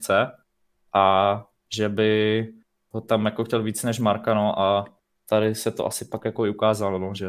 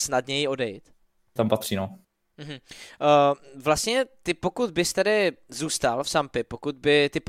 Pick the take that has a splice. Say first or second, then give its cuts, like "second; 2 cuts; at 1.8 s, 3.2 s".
second; 1 cut; at 1.4 s